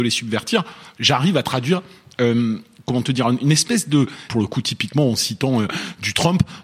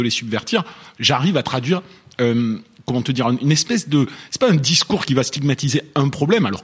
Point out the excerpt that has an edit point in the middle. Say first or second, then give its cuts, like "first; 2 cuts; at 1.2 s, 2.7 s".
first; 1 cut; at 4.3 s